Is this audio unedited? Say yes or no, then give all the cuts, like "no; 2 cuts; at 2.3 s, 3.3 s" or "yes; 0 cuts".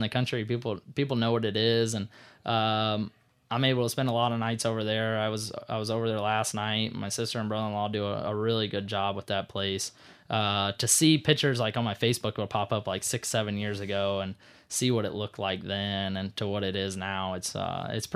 yes; 0 cuts